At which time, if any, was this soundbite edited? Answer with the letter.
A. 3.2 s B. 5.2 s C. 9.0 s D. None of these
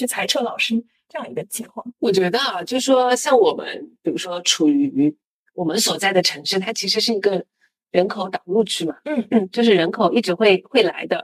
D